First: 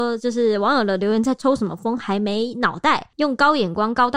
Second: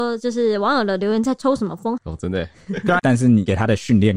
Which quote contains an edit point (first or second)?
second